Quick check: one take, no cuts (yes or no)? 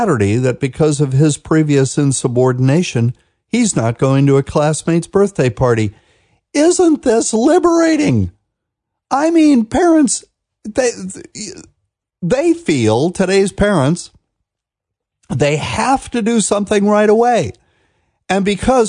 yes